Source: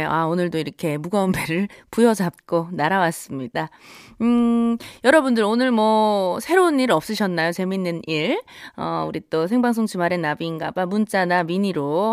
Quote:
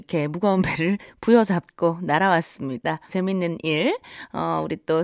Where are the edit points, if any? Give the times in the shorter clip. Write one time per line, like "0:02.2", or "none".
0:03.1